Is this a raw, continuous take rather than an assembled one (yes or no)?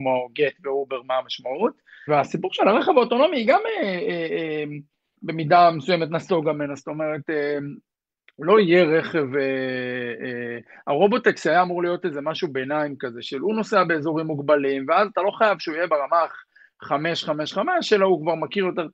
no